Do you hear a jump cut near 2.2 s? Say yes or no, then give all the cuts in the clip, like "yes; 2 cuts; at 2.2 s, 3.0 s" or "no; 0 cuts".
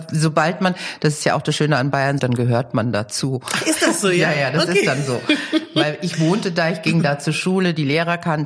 yes; 1 cut; at 2.2 s